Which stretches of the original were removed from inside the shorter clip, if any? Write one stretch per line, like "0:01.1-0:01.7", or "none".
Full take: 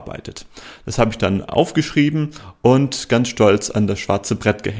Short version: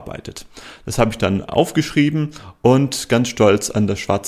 none